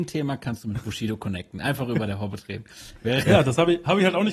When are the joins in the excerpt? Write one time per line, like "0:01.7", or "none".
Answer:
none